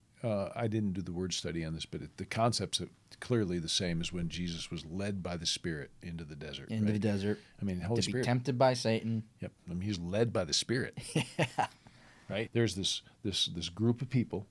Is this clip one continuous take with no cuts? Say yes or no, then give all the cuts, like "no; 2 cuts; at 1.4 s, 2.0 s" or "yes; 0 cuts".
no; 2 cuts; at 9.6 s, 12.5 s